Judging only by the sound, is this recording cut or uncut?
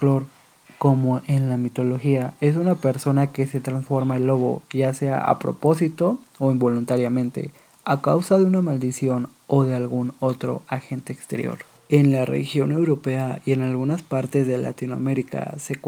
uncut